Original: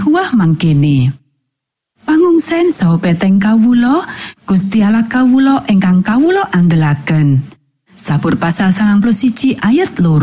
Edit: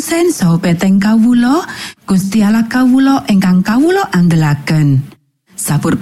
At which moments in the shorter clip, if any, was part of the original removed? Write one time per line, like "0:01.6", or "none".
none